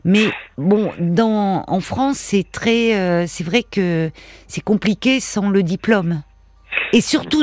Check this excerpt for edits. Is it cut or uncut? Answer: uncut